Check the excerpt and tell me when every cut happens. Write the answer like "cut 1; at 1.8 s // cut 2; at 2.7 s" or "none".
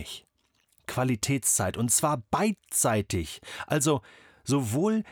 none